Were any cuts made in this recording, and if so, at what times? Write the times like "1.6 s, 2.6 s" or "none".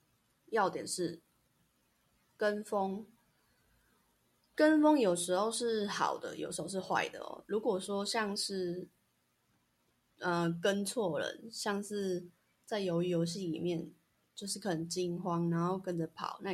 none

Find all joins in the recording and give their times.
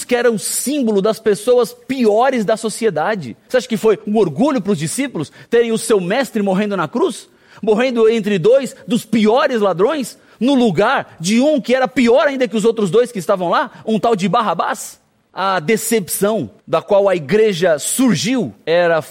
3.5 s, 16.6 s

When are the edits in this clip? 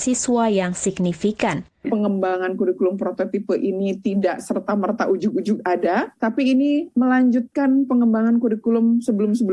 1.8 s, 6.2 s

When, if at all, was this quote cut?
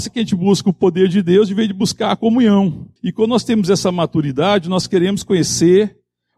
3.0 s

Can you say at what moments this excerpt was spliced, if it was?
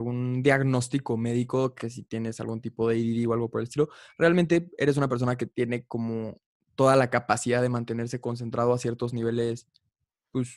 none

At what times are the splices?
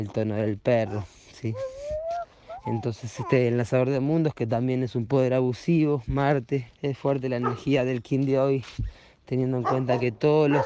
6.7 s

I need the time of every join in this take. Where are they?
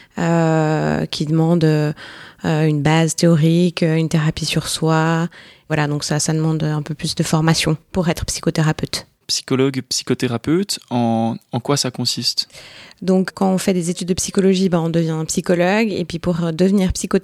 9.2 s

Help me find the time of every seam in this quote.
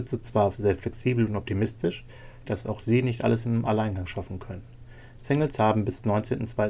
2.4 s, 5.2 s

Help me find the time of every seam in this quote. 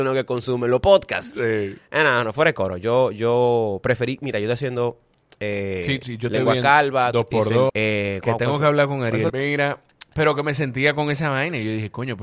7.7 s, 9.3 s

